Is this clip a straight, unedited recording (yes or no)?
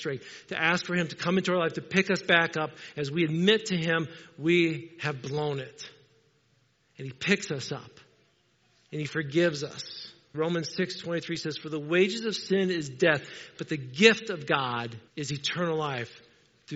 no